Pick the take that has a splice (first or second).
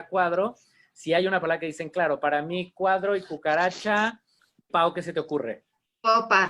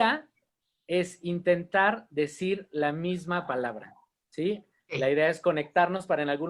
first